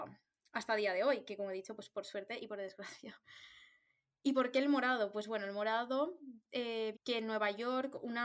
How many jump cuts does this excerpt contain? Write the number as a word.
one